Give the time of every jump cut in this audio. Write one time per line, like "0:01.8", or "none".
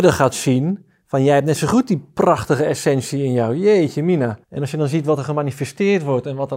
0:04.4